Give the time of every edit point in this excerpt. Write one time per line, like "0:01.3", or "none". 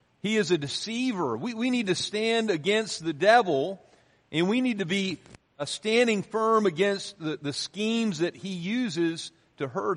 none